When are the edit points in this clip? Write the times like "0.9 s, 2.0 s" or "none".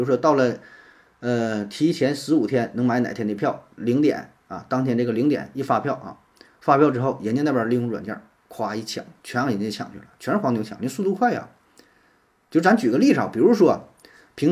none